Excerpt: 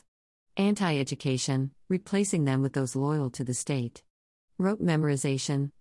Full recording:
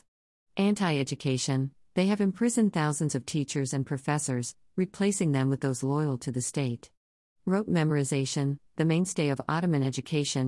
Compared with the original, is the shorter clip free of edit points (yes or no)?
no